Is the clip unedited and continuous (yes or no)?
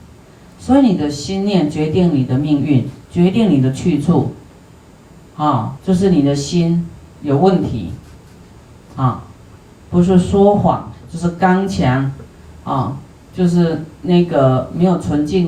no